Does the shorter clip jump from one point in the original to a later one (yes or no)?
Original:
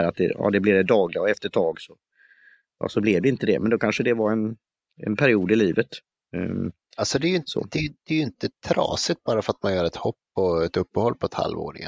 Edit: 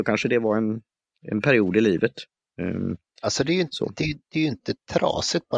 no